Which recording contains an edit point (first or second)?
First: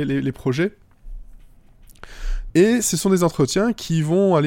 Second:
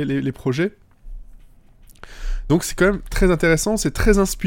first